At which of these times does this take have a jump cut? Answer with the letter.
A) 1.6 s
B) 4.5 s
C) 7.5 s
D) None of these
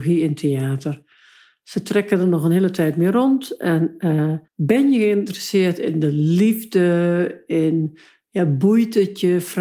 B